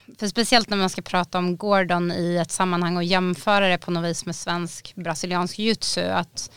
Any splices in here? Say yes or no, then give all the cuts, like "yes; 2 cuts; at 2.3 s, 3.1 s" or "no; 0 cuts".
no; 0 cuts